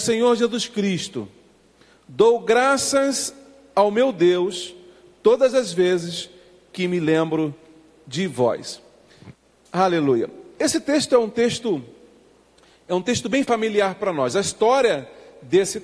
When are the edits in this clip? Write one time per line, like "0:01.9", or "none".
none